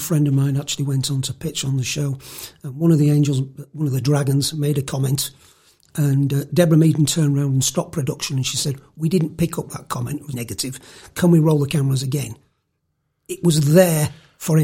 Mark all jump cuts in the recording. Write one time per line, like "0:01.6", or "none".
0:10.3

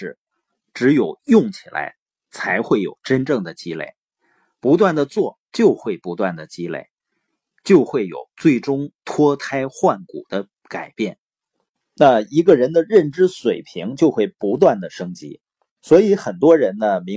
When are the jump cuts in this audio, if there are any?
none

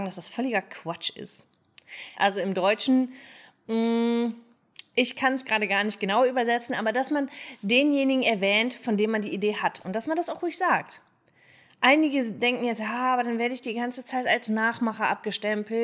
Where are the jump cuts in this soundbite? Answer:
0:02.1

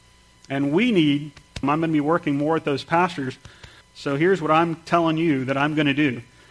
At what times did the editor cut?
0:01.6
0:03.8

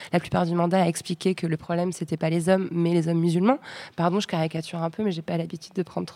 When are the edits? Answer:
none

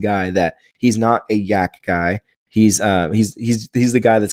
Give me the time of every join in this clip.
none

